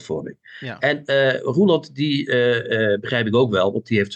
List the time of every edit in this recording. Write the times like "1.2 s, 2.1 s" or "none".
none